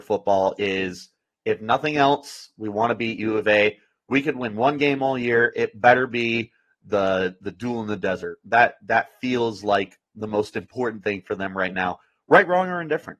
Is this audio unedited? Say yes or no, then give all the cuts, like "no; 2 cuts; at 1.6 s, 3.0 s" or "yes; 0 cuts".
yes; 0 cuts